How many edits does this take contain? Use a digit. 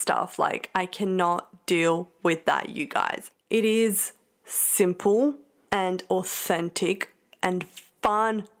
0